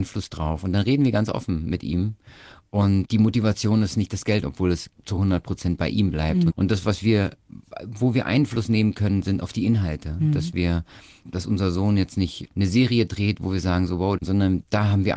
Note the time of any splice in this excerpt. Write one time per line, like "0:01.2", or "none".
0:04.4
0:06.5
0:14.2